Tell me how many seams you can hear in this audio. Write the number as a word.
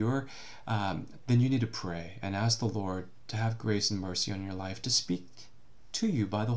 one